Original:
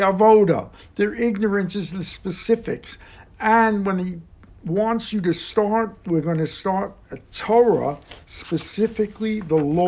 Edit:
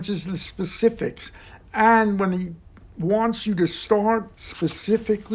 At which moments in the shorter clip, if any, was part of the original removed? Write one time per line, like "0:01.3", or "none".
0:04.3